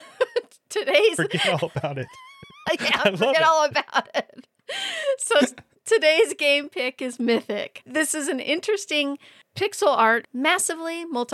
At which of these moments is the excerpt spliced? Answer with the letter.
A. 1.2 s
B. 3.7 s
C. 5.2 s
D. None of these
D